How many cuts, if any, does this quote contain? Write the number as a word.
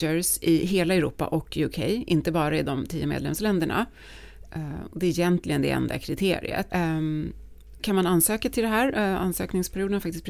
three